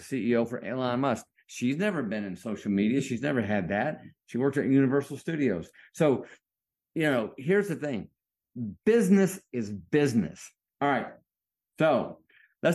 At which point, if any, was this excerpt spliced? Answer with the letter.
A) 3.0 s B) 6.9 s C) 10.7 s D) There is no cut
C